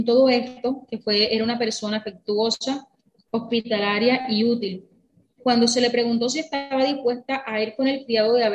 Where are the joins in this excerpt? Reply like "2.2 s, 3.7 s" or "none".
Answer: none